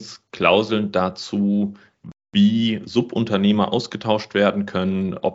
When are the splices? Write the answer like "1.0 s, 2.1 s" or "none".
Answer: none

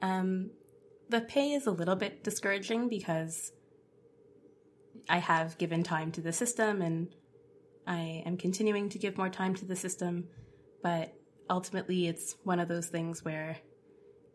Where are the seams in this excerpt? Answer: none

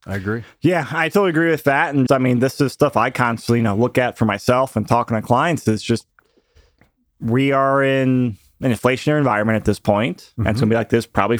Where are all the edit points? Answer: 2.1 s

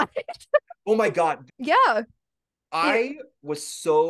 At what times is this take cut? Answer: 1.5 s

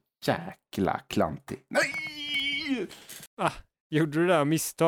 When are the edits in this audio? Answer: none

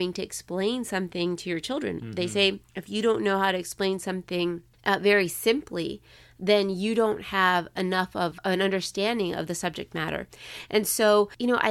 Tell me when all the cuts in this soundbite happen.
none

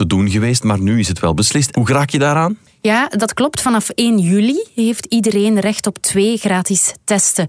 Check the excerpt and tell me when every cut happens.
1.7 s

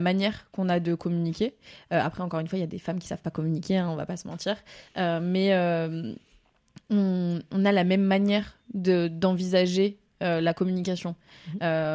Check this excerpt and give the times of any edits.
none

